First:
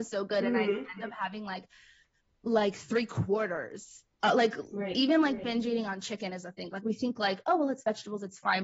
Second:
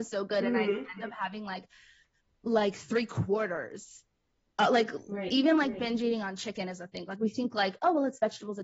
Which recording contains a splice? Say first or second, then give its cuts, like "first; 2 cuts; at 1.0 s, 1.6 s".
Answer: first; 1 cut; at 4.1 s